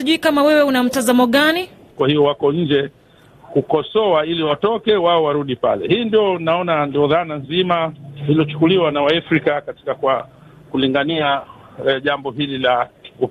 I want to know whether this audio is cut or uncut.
cut